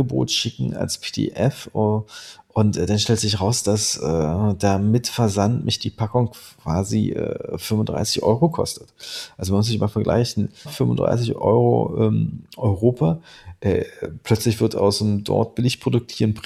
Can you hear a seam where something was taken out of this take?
yes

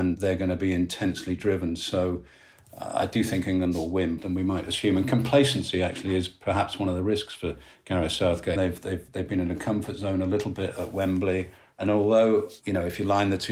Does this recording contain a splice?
yes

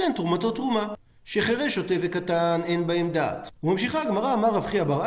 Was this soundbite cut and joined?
yes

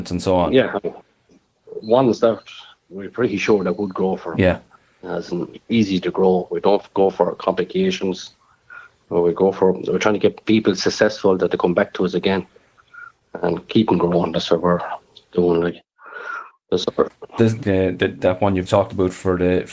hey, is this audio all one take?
no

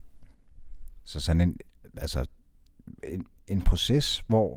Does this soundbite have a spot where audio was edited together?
no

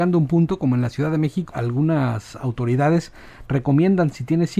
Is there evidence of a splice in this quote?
yes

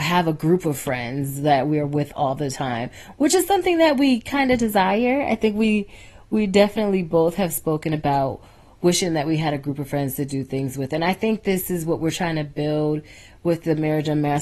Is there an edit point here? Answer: no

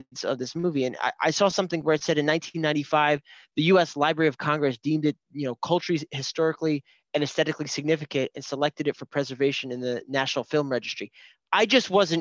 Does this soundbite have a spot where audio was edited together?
no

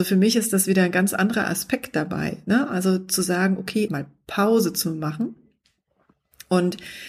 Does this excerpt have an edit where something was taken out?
yes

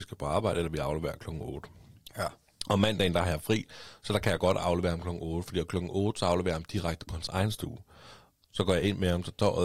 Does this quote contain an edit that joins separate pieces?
no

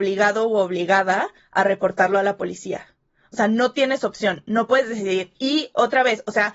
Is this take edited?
no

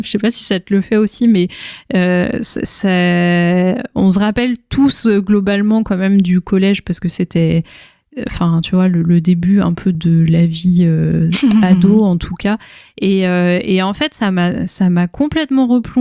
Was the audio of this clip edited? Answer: yes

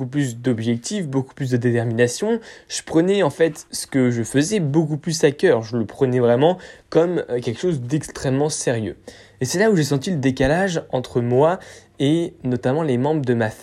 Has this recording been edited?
no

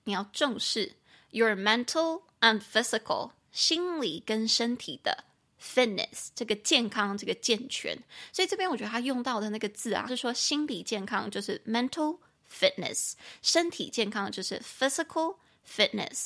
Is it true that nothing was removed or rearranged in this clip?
no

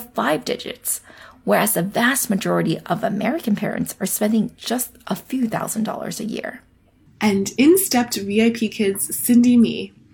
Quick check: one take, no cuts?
yes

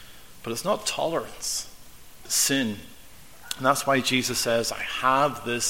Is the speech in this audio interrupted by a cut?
yes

